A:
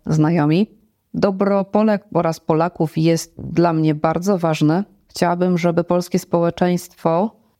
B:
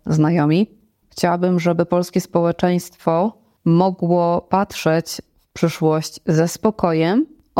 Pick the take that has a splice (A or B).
B